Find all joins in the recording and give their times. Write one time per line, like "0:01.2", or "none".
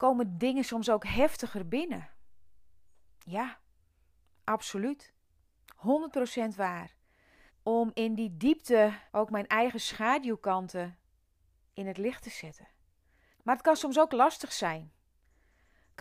0:07.5
0:09.1
0:13.3